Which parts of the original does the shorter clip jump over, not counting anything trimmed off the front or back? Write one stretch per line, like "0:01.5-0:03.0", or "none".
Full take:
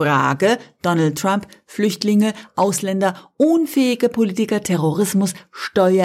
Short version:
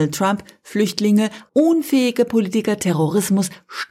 0:02.5-0:03.3